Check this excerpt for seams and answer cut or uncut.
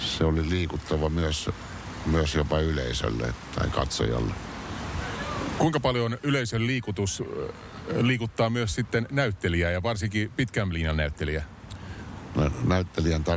uncut